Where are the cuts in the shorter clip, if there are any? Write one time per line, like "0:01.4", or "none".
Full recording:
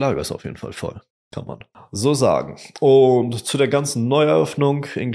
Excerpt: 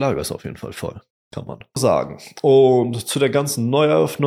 0:01.8